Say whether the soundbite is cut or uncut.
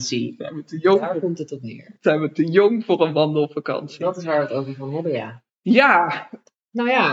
cut